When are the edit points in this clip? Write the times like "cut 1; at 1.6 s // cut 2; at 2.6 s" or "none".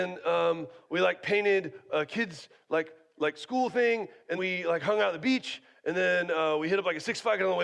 cut 1; at 4.4 s